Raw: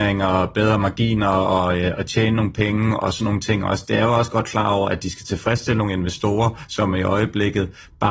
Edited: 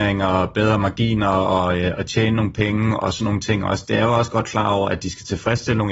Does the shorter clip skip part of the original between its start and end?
no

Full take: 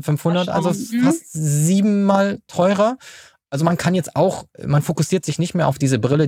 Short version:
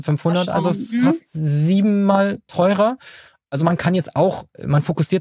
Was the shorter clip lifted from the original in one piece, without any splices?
yes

